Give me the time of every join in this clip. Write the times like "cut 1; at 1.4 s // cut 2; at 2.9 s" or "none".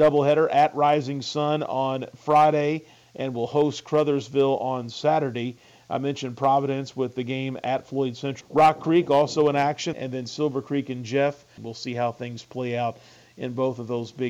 cut 1; at 8.4 s // cut 2; at 9.9 s // cut 3; at 11.6 s